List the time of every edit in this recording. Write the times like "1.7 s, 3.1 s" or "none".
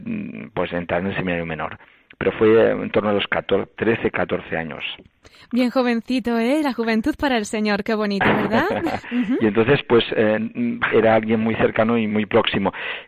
9.0 s, 10.9 s, 12.1 s